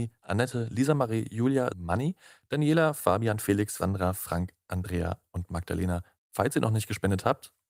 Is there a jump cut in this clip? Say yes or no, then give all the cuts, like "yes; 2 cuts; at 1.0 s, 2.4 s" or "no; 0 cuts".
yes; 3 cuts; at 1.7 s, 3.8 s, 6.2 s